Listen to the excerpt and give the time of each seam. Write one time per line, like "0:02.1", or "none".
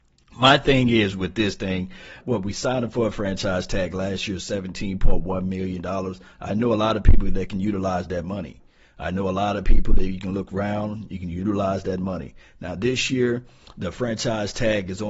0:02.2